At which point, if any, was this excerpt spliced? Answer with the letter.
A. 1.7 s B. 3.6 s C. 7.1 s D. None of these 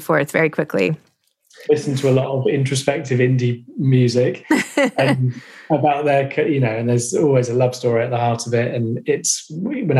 A